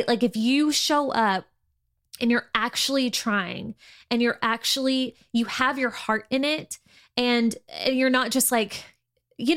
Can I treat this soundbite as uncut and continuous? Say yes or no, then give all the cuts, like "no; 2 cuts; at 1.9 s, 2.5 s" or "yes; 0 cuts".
yes; 0 cuts